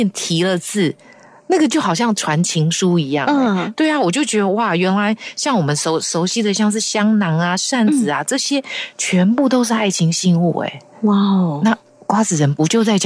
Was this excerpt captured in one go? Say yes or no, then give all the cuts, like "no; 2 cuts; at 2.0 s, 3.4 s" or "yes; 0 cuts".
yes; 0 cuts